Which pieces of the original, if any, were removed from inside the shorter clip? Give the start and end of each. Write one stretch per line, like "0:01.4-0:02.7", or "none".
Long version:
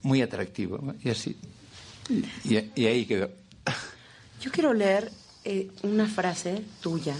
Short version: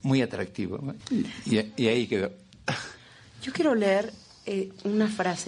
0:01.0-0:02.0